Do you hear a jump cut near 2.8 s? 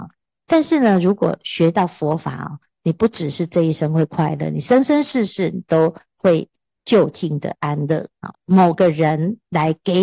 no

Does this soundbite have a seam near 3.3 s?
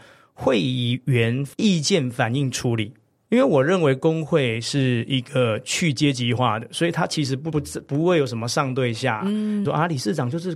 yes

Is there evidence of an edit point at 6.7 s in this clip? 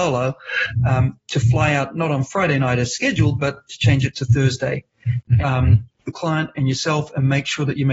no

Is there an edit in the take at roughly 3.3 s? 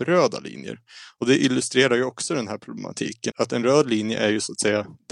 yes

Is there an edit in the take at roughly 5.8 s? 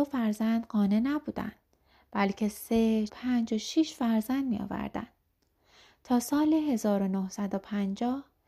no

